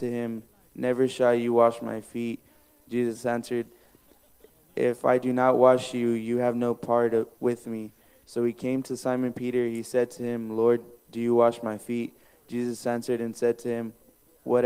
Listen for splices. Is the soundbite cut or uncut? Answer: cut